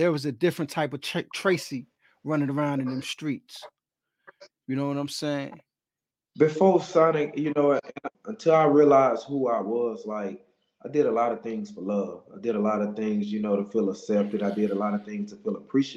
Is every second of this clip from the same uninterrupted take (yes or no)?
no